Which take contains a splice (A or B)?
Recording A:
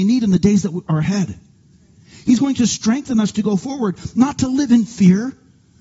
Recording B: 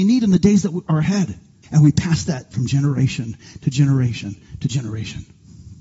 B